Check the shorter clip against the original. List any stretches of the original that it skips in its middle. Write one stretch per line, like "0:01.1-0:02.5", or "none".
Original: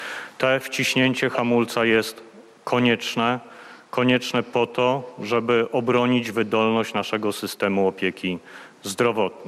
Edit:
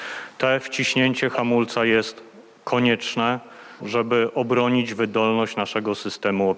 0:03.8-0:05.2

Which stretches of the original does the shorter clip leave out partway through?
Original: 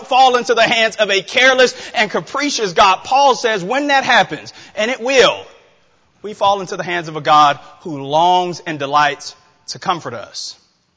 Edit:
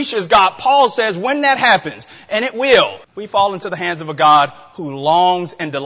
0:05.5-0:06.1

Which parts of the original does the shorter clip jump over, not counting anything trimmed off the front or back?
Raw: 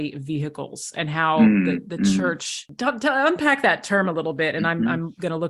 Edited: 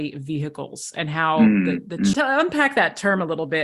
0:02.1-0:03.0

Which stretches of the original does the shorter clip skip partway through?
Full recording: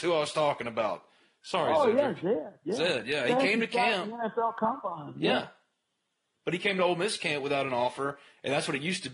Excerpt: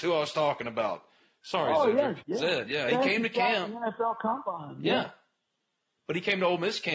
0:02.2-0:02.6

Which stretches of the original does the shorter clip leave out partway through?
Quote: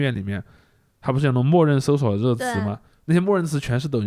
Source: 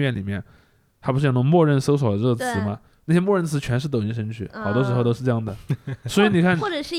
none

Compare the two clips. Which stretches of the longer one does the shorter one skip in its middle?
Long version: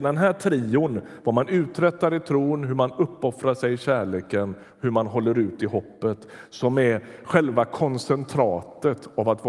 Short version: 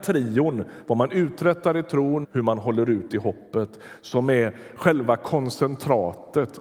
0:02.6-0:04.7

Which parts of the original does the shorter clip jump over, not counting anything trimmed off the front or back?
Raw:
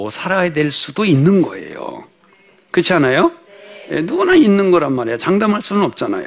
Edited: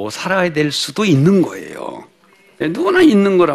0:02.6-0:03.9

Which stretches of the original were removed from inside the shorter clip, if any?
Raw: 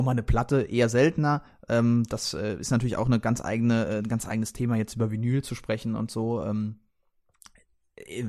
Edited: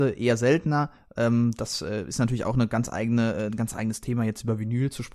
none

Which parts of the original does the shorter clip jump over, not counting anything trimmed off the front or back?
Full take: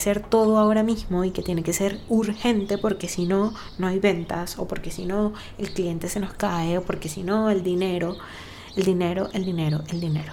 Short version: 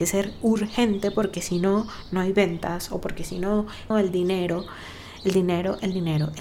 0:05.6-0:07.4

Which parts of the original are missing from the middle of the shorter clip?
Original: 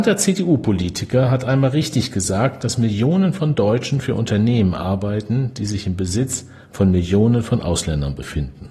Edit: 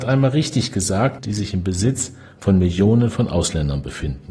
0:02.6-0:05.5

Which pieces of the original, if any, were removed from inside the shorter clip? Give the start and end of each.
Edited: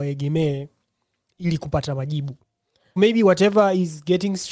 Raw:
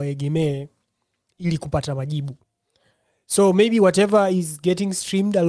0:03.0-0:03.5

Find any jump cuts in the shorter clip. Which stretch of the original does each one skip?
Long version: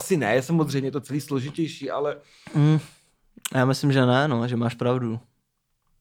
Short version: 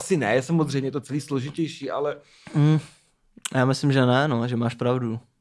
none

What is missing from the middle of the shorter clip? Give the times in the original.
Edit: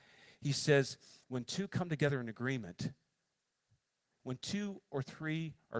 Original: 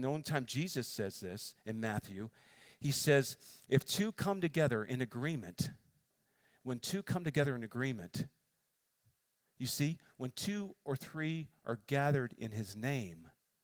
0:03.6-0:06.6
0:09.5-0:10.1

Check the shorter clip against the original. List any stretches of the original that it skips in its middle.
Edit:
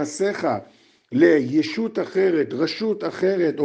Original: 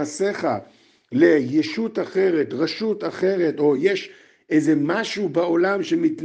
none

